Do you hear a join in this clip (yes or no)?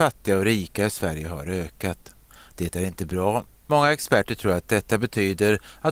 yes